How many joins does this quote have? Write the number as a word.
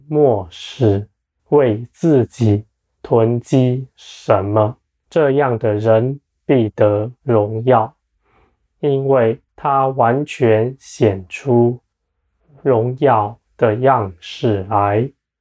three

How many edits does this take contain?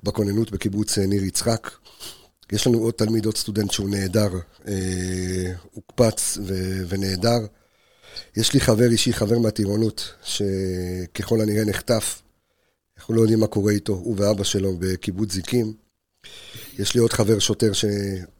zero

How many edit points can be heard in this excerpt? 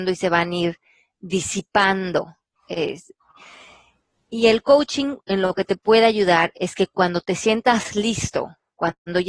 zero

